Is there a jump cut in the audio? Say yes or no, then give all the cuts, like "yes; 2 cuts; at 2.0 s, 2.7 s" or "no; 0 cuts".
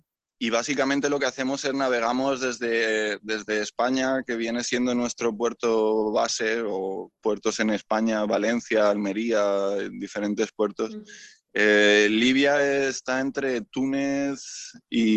yes; 1 cut; at 11.4 s